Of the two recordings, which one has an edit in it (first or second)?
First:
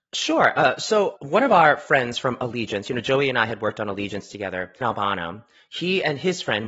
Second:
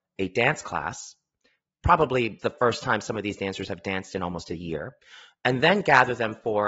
first